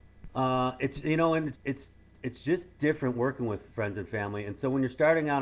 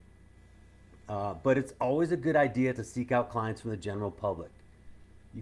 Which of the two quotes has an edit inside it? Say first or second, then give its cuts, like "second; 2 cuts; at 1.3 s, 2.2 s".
first; 1 cut; at 1.5 s